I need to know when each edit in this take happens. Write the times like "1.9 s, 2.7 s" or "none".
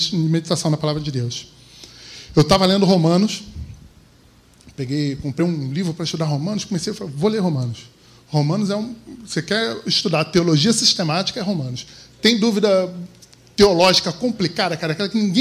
none